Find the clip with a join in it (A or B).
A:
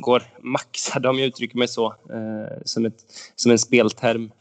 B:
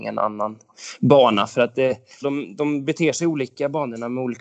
B